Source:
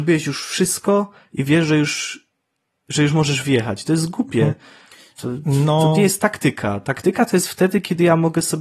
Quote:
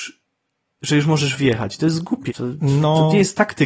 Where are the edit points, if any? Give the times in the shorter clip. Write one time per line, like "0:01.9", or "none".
0:02.3